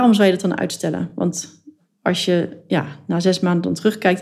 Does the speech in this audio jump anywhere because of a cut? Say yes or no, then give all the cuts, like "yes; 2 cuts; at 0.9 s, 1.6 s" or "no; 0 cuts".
no; 0 cuts